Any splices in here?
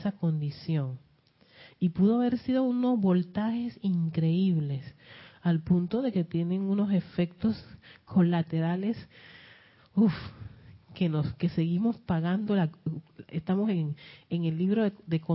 no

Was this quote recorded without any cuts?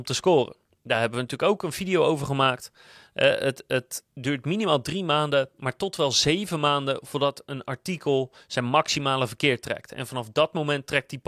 yes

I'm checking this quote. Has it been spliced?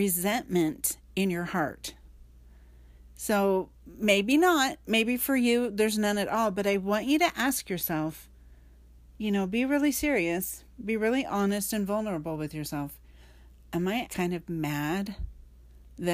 yes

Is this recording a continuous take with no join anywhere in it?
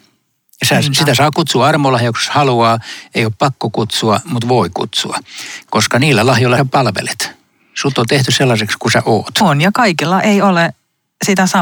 no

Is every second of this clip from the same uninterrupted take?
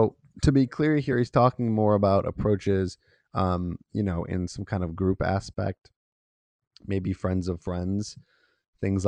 yes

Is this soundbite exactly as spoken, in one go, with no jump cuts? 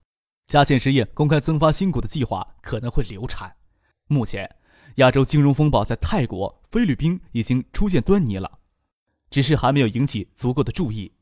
no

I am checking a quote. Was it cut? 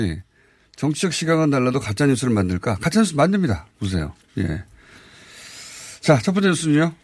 no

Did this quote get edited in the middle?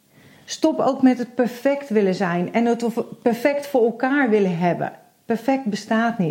no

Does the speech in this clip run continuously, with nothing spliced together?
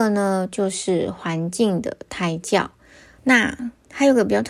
no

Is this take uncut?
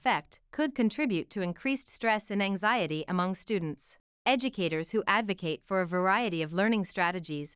no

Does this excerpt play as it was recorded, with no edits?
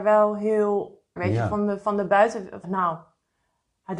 no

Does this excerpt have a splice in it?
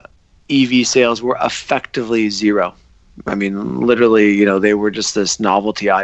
no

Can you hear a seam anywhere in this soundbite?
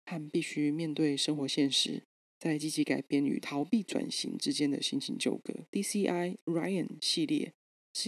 yes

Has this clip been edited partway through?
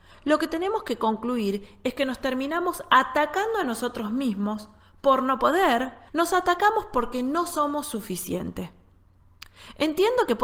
yes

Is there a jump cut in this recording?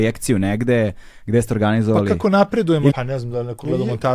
yes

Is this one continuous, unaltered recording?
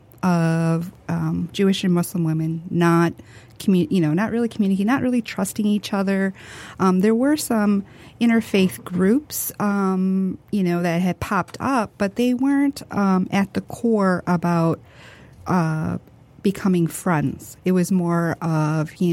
yes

